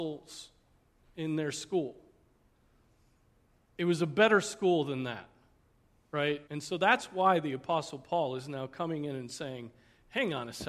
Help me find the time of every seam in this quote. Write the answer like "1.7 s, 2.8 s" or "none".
6.5 s